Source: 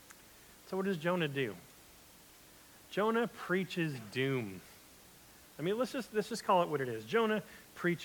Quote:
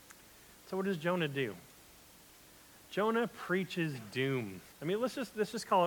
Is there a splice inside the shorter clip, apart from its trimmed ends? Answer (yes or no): yes